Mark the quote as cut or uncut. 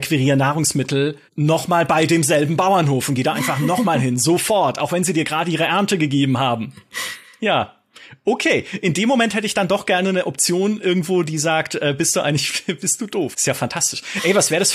cut